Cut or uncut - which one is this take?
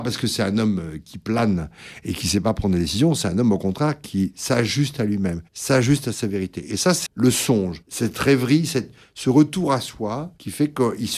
cut